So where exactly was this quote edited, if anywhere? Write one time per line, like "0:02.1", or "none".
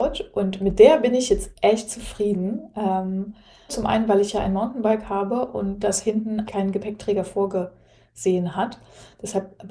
0:03.7
0:06.5